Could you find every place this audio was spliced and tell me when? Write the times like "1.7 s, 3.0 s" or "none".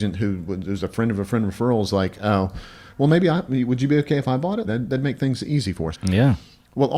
4.6 s, 5.9 s